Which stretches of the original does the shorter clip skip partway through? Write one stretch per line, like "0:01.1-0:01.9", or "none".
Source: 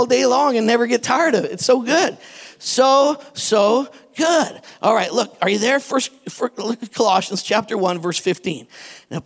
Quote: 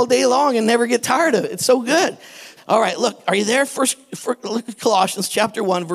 0:02.6-0:04.7

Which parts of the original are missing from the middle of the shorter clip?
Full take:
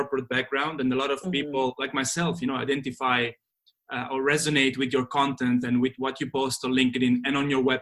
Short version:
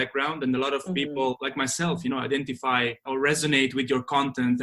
0:03.4-0:04.1

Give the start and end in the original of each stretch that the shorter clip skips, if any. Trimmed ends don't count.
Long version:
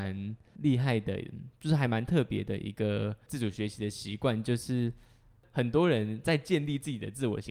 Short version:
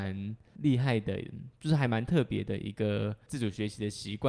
none

